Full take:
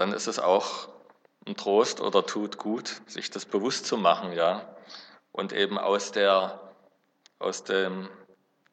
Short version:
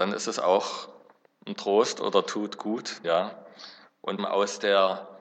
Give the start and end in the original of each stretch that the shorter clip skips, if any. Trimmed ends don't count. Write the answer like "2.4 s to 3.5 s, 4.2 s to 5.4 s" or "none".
3.0 s to 4.3 s, 5.5 s to 5.7 s